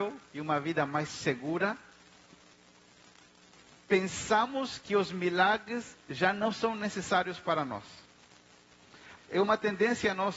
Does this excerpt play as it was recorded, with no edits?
no; 1 cut; at 9.2 s

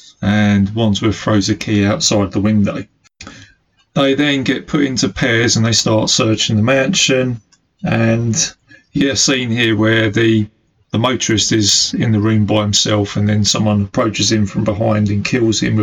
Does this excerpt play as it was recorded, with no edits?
yes; 0 cuts

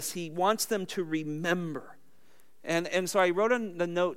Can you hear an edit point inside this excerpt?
no; 0 cuts

